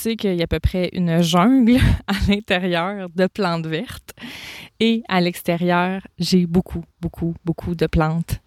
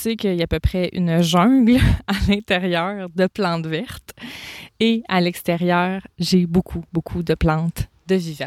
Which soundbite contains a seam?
second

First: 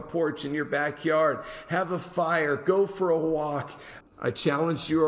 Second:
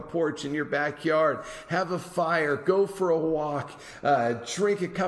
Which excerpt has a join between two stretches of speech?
first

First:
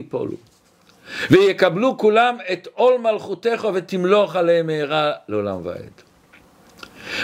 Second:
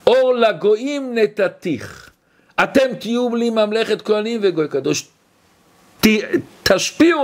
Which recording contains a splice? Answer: second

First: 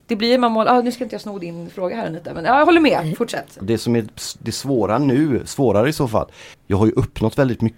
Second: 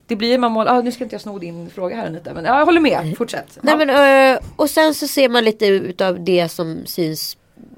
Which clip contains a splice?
first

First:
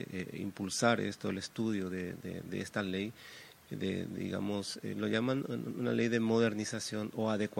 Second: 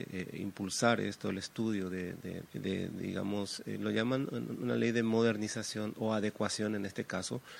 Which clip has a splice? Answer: second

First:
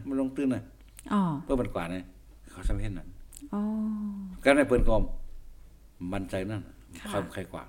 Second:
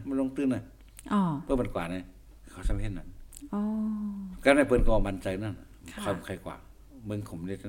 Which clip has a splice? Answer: second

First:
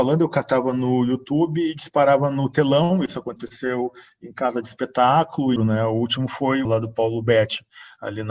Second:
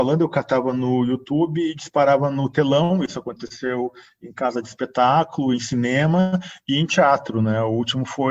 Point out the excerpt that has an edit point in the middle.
first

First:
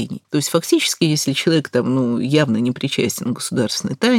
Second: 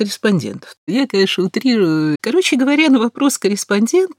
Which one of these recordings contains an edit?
second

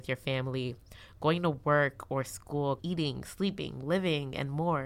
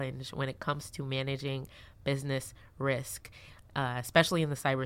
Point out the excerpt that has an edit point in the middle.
first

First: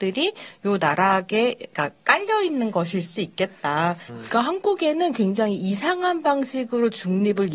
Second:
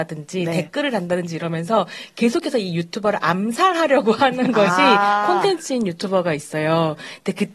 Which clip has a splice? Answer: first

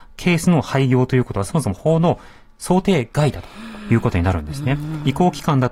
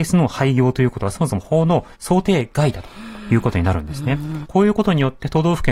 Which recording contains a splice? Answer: second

